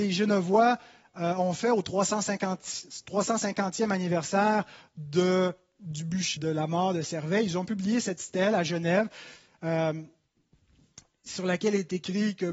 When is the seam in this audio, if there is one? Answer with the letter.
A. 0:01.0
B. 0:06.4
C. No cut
B